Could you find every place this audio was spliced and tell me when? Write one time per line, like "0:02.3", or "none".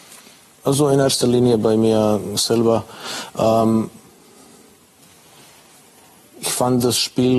none